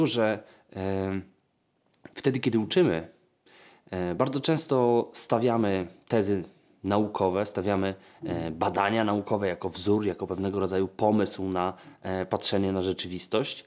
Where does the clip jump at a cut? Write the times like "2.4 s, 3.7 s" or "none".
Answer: none